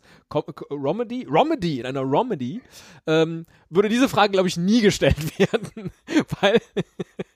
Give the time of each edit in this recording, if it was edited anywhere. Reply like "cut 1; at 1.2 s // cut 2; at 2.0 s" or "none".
none